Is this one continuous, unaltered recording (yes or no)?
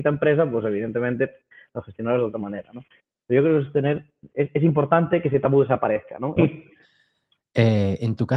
no